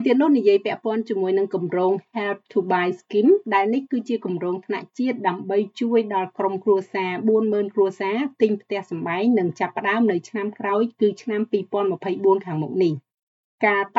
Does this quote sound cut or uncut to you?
cut